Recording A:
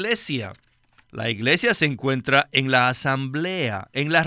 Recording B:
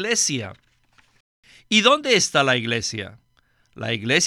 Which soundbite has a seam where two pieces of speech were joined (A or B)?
A